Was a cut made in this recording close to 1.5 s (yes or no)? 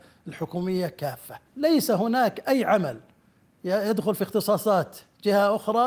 yes